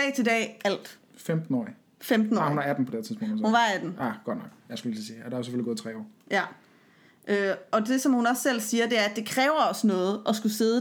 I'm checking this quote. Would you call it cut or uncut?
uncut